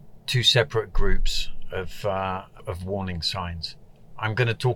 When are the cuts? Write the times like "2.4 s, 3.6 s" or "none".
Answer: 2.6 s